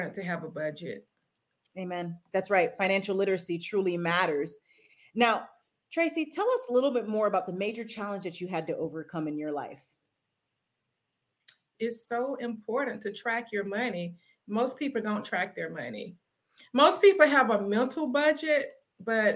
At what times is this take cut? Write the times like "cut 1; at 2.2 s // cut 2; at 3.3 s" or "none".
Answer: cut 1; at 11.7 s